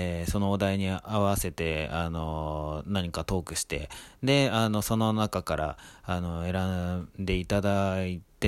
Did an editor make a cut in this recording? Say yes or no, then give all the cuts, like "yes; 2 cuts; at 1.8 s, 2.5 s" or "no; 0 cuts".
no; 0 cuts